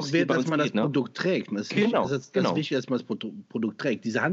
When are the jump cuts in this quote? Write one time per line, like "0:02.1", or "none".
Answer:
none